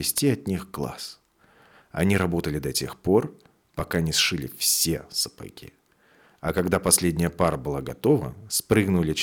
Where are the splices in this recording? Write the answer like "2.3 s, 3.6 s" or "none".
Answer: none